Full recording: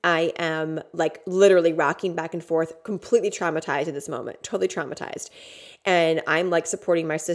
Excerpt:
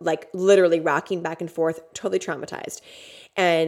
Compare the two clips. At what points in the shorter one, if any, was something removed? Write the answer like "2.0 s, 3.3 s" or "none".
1.9 s